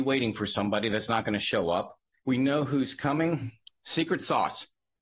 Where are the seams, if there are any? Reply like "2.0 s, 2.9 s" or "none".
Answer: 2.2 s